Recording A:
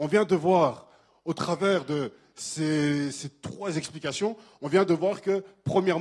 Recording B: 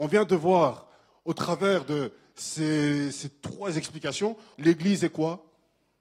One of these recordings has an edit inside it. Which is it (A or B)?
B